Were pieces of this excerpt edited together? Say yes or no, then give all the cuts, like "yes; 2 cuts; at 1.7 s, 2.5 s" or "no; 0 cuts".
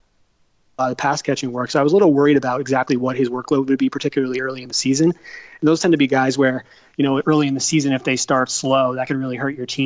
no; 0 cuts